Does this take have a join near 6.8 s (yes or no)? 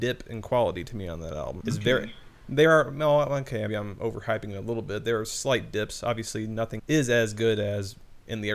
yes